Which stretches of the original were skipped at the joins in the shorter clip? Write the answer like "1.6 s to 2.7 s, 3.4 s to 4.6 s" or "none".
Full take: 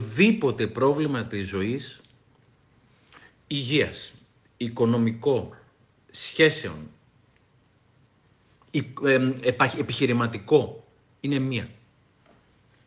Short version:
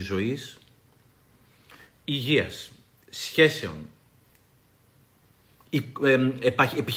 4.5 s to 6.1 s